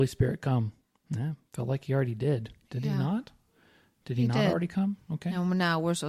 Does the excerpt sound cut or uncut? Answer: uncut